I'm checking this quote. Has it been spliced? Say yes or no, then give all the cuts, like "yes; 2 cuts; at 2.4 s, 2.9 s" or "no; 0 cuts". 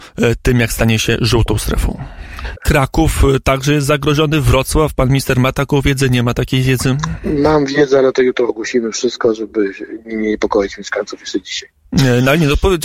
yes; 1 cut; at 2.6 s